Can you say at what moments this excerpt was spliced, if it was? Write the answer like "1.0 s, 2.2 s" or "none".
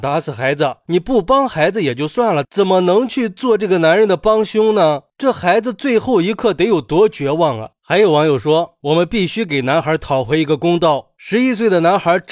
7.7 s, 8.8 s